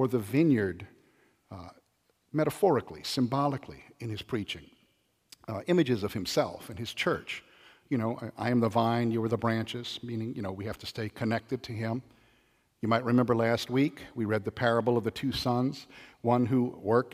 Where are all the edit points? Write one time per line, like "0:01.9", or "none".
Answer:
none